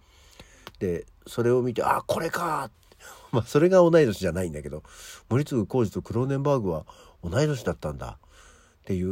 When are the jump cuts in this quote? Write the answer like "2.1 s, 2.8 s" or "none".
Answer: 2.7 s